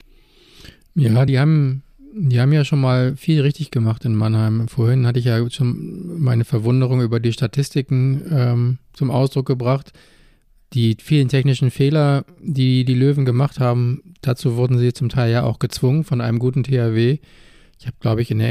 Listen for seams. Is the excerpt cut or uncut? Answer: uncut